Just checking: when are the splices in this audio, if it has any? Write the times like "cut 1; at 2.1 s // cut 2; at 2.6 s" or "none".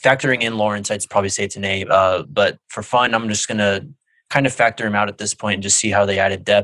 none